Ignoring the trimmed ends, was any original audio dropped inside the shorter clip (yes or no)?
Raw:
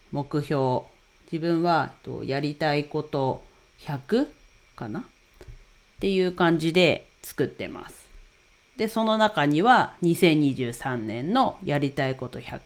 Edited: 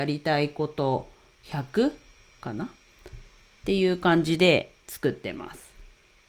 no